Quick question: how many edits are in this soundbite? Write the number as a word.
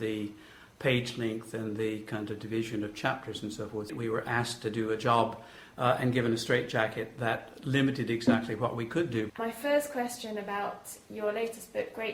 two